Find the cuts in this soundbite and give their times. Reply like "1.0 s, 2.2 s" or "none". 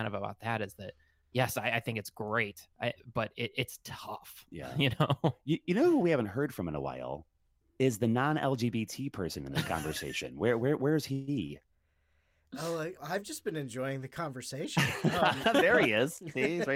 13.0 s